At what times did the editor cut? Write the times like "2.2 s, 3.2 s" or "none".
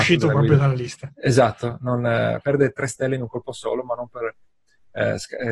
none

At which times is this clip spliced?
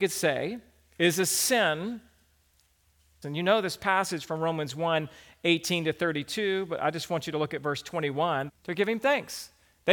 3.2 s, 8.5 s

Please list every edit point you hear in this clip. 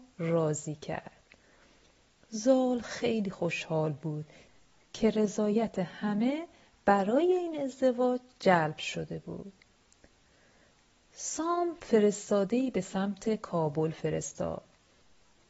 none

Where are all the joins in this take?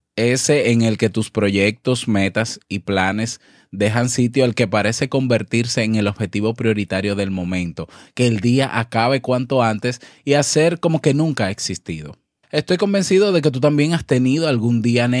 12.4 s

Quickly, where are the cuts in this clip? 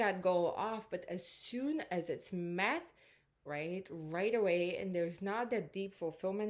3.5 s

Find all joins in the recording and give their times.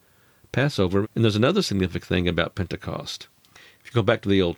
1.0 s

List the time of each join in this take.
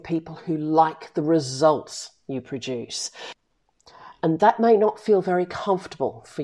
none

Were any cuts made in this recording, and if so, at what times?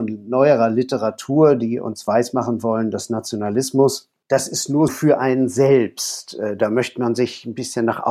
4.9 s

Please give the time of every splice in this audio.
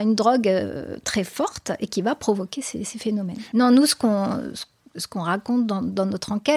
3.5 s

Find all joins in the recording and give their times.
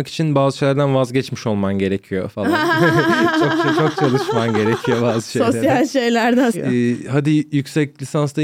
6.5 s

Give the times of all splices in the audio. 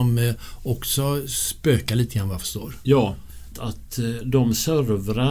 3.5 s

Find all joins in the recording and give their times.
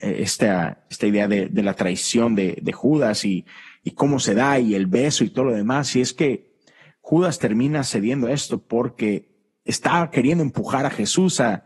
none

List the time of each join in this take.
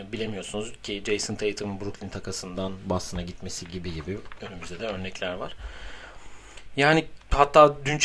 none

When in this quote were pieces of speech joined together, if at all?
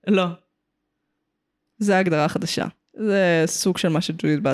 1.7 s, 2.8 s

